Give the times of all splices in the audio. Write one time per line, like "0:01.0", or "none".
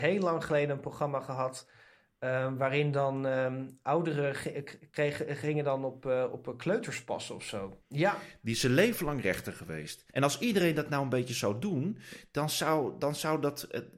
0:07.8
0:10.1